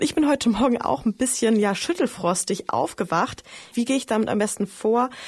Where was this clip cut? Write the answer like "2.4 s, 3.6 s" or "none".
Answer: none